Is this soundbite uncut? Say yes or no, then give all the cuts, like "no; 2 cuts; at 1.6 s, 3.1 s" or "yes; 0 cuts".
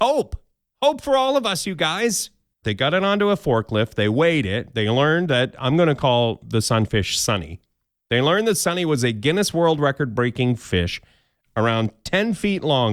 no; 1 cut; at 2.6 s